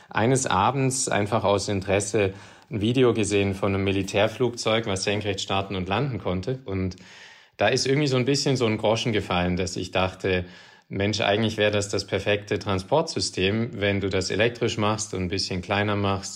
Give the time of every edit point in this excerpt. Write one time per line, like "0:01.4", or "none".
none